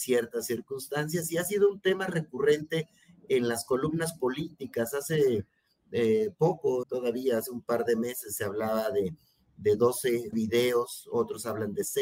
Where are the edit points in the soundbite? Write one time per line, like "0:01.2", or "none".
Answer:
0:06.8
0:10.3